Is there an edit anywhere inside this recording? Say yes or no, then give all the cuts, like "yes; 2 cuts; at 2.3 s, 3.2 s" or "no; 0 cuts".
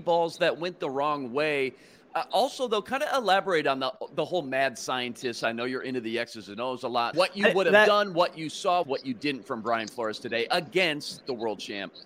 yes; 2 cuts; at 7.1 s, 8.8 s